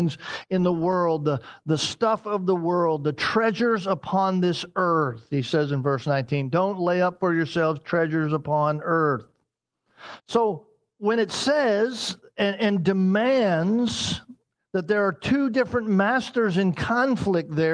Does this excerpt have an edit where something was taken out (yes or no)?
yes